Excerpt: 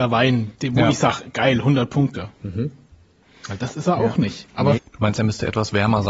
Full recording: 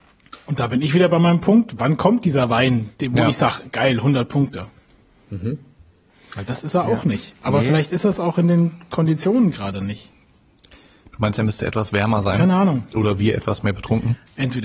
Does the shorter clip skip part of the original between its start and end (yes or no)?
yes